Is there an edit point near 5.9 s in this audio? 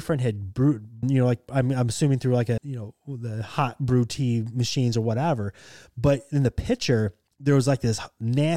no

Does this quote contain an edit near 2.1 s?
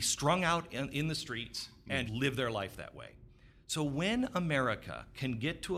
yes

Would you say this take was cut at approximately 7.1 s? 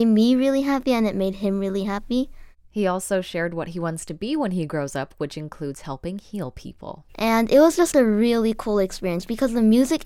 yes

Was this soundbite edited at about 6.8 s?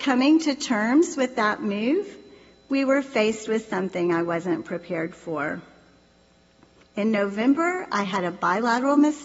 yes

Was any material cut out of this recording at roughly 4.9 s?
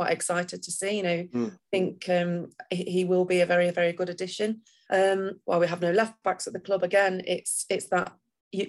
yes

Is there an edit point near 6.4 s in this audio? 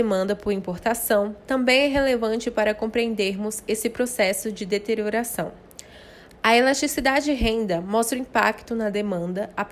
no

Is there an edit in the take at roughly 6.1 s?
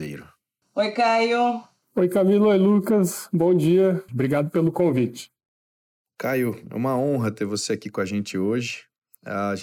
no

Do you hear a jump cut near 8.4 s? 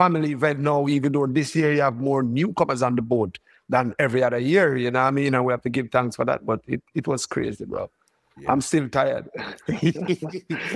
no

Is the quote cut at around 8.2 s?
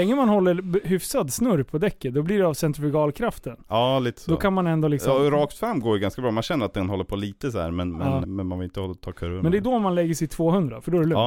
yes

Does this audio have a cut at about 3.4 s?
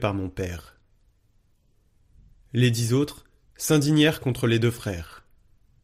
yes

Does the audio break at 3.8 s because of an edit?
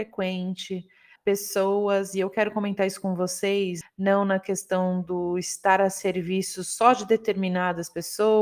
yes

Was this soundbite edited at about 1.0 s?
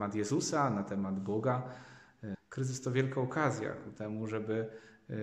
no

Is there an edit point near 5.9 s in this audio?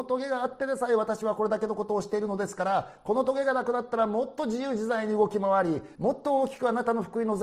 yes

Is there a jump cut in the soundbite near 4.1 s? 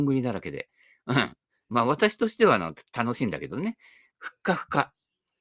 yes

